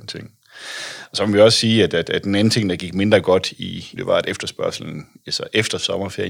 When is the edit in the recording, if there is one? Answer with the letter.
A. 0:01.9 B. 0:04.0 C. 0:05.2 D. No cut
B